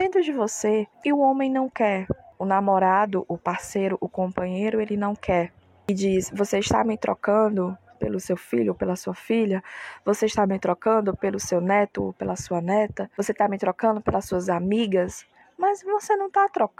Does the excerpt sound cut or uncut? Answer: cut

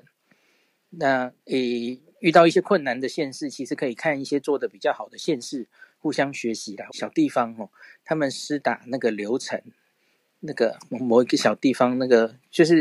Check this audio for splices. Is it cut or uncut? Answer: cut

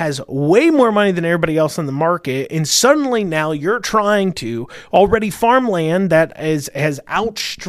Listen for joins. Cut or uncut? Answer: uncut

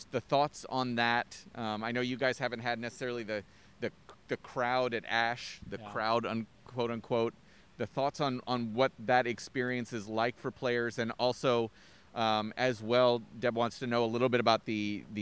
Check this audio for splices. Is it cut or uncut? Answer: uncut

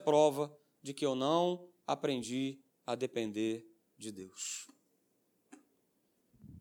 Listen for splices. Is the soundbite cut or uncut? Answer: uncut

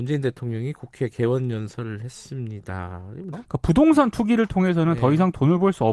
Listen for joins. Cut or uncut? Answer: cut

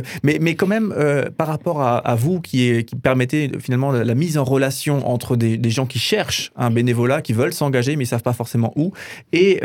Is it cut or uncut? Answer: uncut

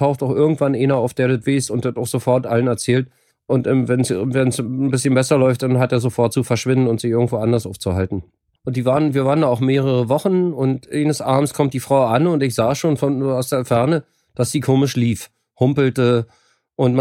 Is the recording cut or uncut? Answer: cut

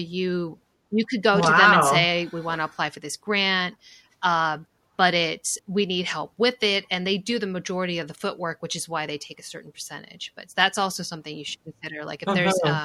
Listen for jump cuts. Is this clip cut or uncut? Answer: cut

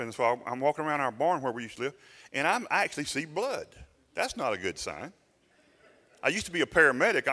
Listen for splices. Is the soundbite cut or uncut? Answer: uncut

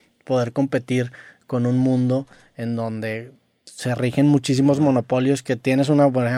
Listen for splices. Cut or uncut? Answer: uncut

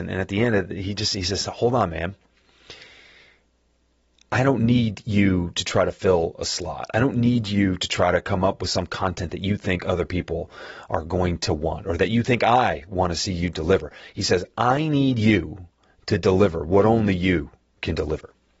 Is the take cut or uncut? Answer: uncut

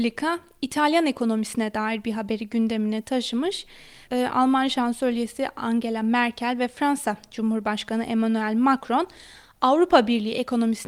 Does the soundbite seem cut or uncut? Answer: cut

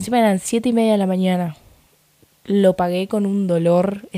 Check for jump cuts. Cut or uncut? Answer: uncut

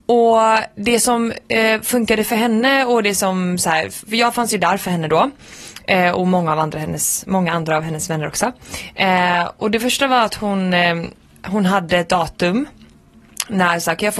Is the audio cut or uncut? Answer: uncut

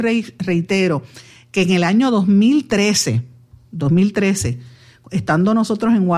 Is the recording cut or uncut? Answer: uncut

